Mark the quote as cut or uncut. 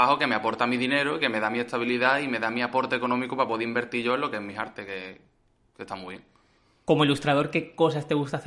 uncut